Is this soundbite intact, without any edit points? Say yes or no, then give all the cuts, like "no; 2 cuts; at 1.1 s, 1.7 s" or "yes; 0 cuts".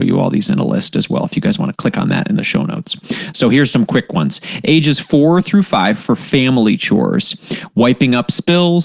no; 1 cut; at 3.7 s